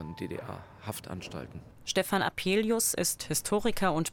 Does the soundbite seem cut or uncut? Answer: cut